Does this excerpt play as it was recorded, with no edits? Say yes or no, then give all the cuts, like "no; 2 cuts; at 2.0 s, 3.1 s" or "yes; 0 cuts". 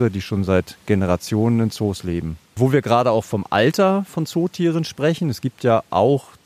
no; 1 cut; at 2.4 s